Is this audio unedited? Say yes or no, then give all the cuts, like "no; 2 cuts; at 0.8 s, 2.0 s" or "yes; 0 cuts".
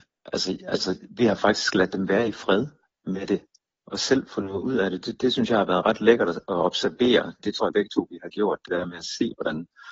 yes; 0 cuts